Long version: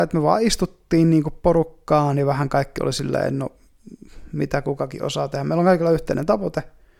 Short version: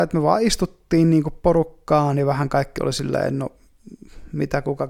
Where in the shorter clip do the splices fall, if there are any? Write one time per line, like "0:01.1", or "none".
none